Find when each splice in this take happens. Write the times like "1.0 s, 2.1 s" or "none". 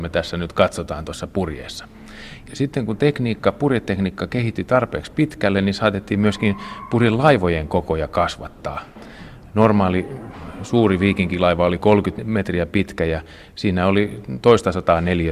2.5 s